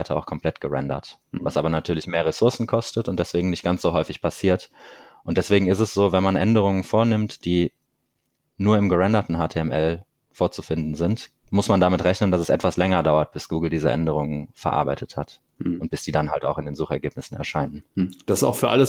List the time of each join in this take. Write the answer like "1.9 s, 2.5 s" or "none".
none